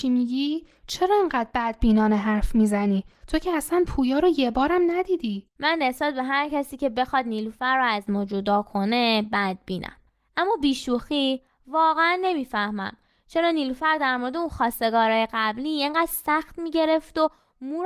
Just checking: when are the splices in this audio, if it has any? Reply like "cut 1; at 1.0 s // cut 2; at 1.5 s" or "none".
none